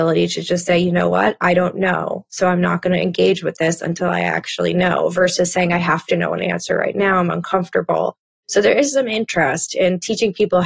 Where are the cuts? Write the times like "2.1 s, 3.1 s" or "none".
8.3 s